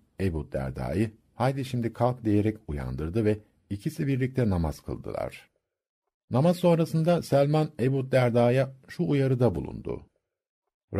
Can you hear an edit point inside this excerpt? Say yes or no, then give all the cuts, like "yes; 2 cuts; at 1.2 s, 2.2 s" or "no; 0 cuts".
no; 0 cuts